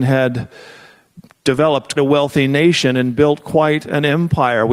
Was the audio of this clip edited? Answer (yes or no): yes